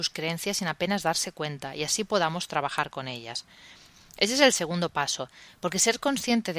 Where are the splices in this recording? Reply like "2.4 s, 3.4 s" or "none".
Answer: 5.5 s